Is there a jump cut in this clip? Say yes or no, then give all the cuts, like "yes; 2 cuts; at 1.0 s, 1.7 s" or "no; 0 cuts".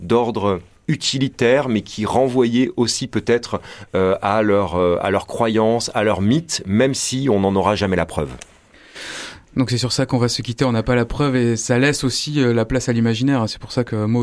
no; 0 cuts